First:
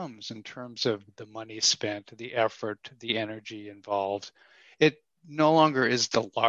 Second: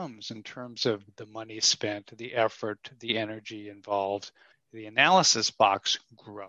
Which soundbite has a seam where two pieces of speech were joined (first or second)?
second